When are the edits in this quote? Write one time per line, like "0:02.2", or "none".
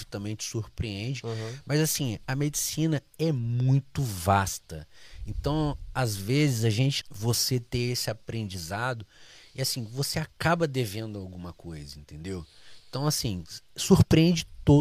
0:07.0